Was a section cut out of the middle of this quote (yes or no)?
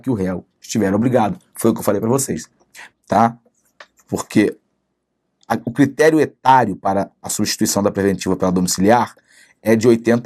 yes